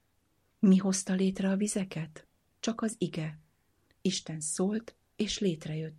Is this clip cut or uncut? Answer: uncut